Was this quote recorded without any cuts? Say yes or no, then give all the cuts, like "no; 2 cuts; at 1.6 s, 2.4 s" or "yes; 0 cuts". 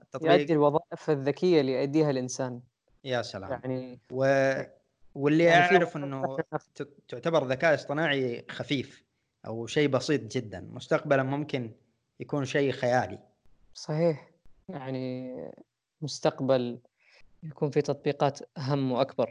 no; 1 cut; at 6.7 s